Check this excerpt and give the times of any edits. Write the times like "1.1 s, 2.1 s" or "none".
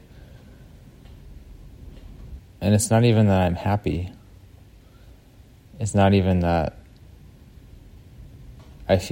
2.4 s